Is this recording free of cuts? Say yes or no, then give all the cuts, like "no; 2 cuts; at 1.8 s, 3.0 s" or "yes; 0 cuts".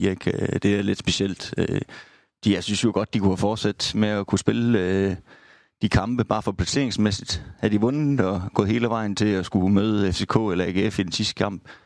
yes; 0 cuts